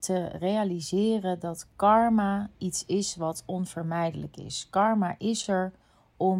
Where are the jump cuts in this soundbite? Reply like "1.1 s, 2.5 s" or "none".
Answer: none